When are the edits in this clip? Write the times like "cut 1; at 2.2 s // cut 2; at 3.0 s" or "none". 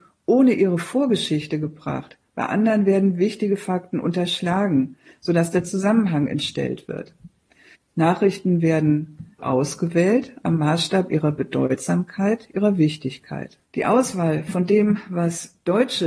cut 1; at 7.9 s // cut 2; at 9.4 s // cut 3; at 13.6 s